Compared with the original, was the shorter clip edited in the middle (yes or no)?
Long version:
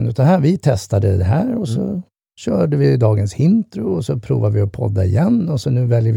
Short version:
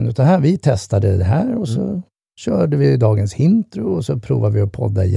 no